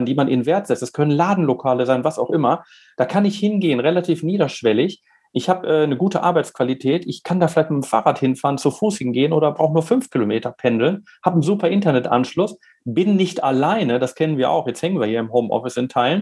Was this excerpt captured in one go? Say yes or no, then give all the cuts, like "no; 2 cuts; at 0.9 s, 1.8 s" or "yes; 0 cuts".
yes; 0 cuts